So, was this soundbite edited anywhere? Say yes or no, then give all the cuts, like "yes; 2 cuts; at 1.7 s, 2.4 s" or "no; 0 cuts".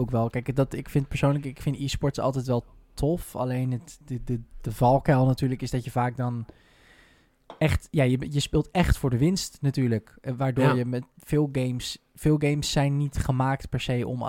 no; 0 cuts